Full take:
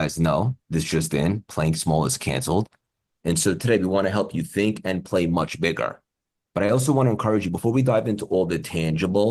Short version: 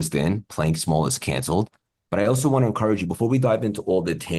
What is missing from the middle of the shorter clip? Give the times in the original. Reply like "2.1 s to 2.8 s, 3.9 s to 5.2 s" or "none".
3.0 s to 6.5 s